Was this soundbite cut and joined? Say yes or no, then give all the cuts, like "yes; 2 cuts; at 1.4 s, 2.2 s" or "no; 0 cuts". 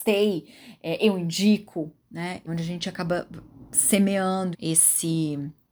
yes; 2 cuts; at 2.5 s, 4.5 s